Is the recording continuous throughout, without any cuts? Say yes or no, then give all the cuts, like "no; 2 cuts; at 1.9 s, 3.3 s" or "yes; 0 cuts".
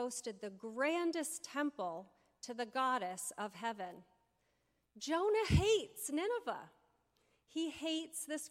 yes; 0 cuts